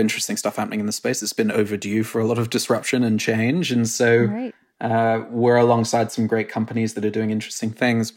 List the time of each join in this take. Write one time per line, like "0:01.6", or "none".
none